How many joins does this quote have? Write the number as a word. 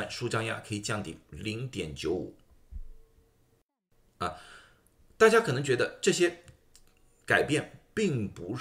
zero